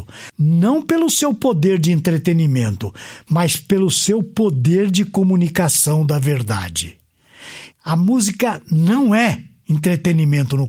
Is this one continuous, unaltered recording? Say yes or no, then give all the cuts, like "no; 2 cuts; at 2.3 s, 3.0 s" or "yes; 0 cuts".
no; 1 cut; at 7.7 s